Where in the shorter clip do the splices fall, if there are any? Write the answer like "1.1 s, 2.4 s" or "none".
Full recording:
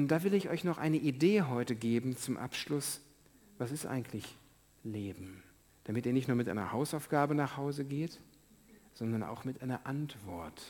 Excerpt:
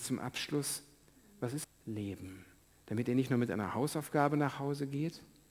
1.6 s

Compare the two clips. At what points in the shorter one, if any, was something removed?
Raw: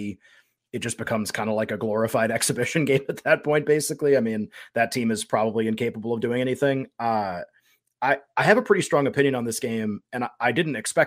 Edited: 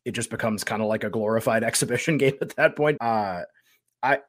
3.0 s

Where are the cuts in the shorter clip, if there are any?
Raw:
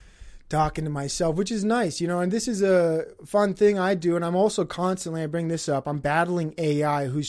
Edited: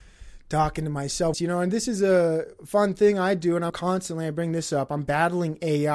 1.3 s, 3.7 s

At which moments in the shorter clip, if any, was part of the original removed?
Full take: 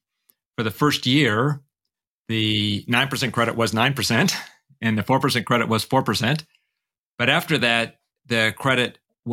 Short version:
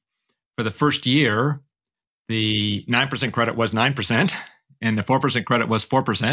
none

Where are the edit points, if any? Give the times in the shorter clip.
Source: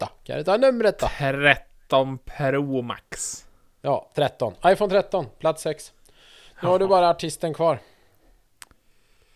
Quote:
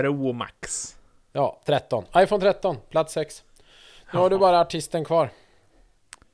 none

